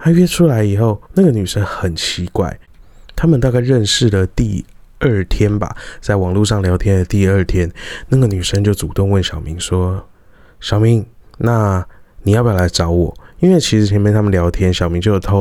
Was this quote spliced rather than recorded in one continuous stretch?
yes; 1 cut; at 1.1 s

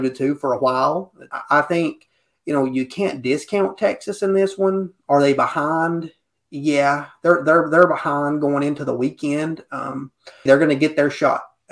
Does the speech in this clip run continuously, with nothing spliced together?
no; 2 cuts; at 1.3 s, 10.5 s

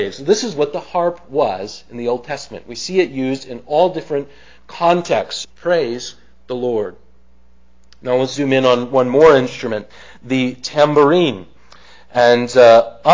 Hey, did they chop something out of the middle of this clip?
yes; 1 cut; at 5.4 s

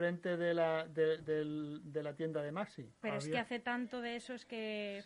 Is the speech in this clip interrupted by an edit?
yes; 2 cuts; at 1.2 s, 3.0 s

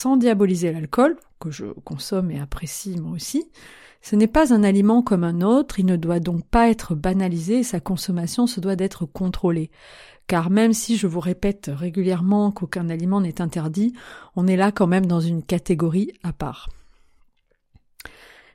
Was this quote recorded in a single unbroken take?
yes; 0 cuts

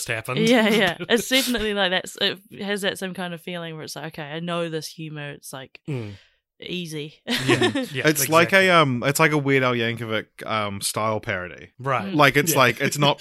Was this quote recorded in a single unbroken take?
yes; 0 cuts

